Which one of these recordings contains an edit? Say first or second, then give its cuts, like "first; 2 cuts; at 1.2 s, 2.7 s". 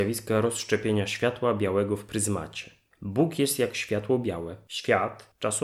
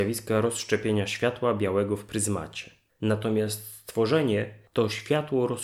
second; 1 cut; at 2.9 s